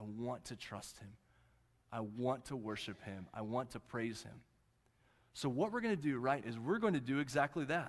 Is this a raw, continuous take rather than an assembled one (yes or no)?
no